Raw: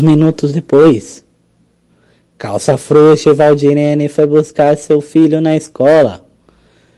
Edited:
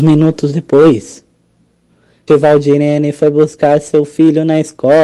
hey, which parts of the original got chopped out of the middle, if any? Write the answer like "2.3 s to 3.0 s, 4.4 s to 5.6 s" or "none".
2.3 s to 3.2 s